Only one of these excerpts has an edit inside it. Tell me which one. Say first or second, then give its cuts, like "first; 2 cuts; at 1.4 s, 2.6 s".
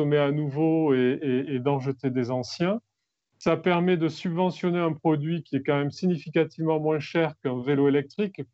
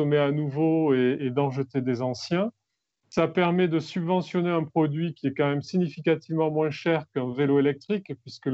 second; 1 cut; at 1.2 s